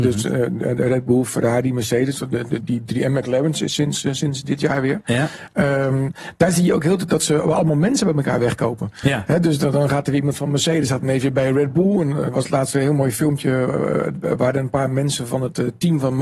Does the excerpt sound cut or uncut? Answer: cut